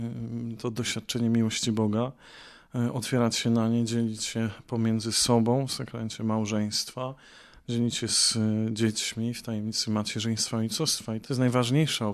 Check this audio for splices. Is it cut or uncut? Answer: cut